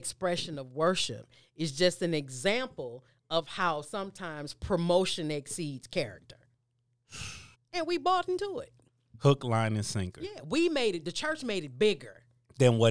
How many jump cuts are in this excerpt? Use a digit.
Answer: 1